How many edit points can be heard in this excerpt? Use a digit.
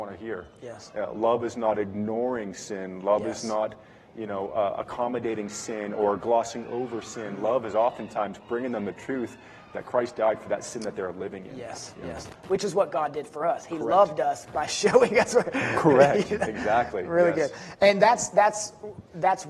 0